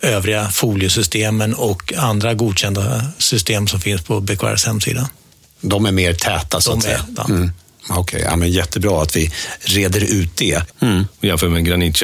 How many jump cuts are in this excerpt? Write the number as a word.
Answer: two